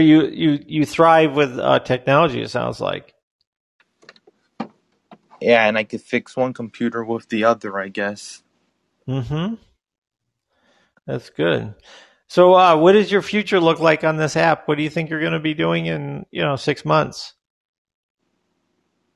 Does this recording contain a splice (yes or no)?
no